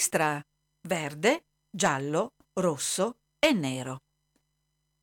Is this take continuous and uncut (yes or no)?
yes